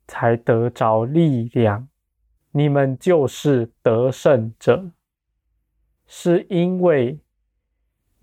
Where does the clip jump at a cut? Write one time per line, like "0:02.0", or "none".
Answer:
0:02.4
0:06.0